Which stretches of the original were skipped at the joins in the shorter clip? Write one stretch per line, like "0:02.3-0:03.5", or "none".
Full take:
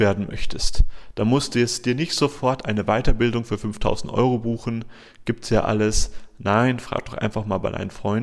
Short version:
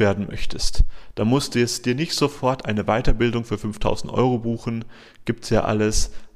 none